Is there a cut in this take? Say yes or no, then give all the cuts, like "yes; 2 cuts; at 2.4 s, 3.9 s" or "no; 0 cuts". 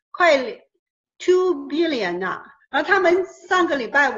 yes; 1 cut; at 2.6 s